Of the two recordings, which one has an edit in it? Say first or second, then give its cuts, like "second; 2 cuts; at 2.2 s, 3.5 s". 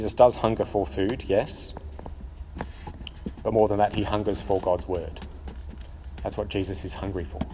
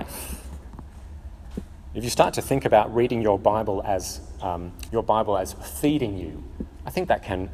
second; 1 cut; at 4.9 s